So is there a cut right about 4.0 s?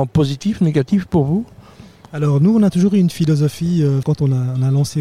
yes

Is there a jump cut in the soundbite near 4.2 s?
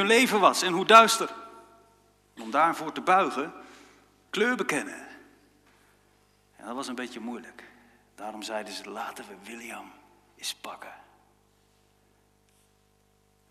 yes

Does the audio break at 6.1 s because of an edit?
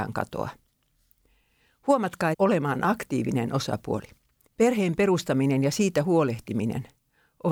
no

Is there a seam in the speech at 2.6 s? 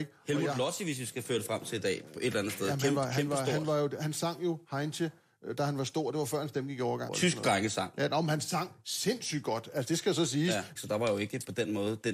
no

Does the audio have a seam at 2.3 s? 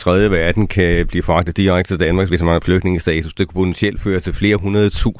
yes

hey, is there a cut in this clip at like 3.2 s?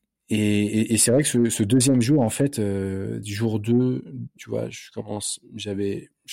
yes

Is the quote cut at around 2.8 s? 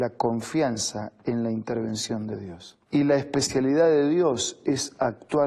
yes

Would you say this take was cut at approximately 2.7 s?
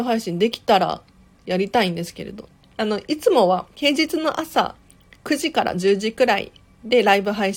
yes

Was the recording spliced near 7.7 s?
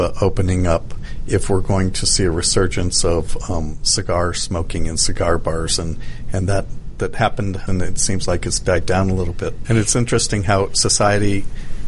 yes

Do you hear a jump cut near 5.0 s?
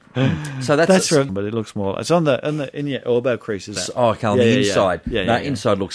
no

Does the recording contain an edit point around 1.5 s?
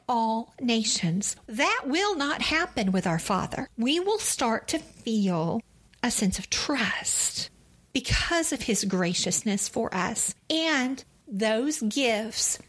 yes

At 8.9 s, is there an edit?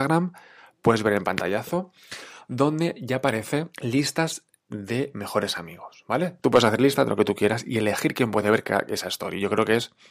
no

